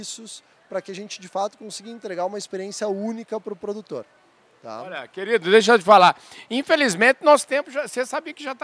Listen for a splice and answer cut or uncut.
uncut